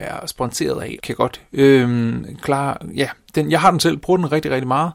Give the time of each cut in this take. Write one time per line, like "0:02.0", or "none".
0:01.0